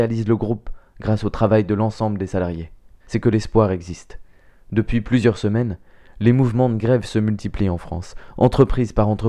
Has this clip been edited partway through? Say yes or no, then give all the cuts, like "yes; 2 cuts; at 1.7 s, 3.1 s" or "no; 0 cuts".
yes; 1 cut; at 3.0 s